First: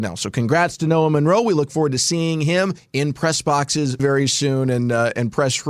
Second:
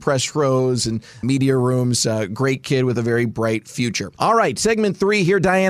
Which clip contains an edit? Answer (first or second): first